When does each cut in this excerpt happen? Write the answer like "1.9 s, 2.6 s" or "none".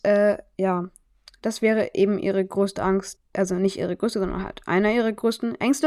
3.2 s